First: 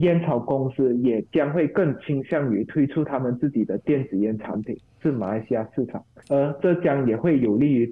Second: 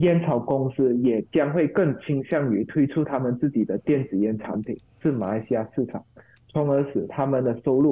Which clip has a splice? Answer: first; 1 cut; at 6.2 s

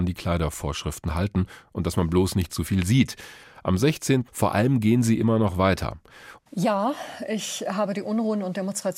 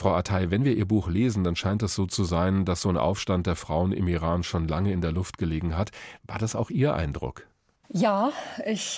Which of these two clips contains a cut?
first; 2 cuts; at 4.3 s, 6.4 s

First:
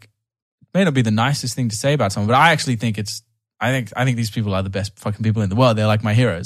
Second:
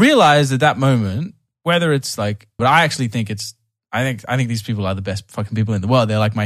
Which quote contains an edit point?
second; 1 cut; at 2.6 s

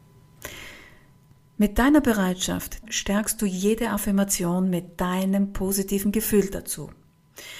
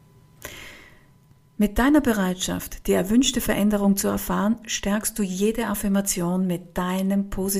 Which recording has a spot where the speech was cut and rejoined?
first; 1 cut; at 2.8 s

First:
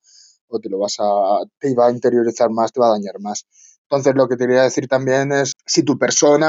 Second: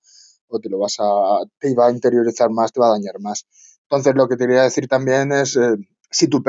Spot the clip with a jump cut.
first; 1 cut; at 5.5 s

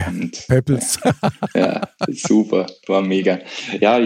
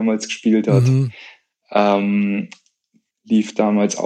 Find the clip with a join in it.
second; 1 cut; at 3.1 s

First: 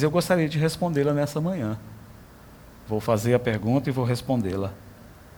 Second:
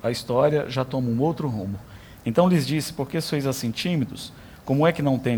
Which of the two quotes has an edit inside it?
second; 1 cut; at 2.2 s

